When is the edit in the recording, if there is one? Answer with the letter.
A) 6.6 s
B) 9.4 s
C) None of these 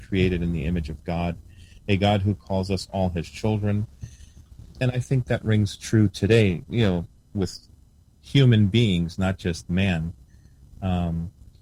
C